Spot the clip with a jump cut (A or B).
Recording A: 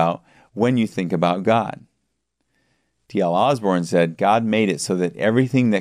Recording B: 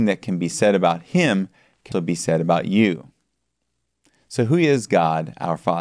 B